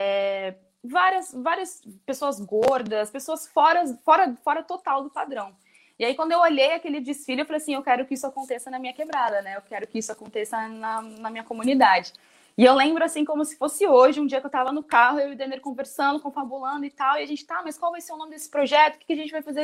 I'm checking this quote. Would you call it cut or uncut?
uncut